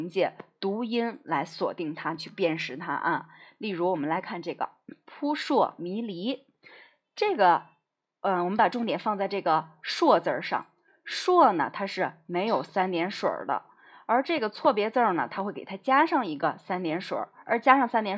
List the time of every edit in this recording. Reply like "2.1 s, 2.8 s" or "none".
none